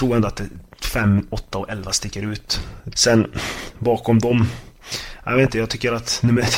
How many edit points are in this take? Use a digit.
1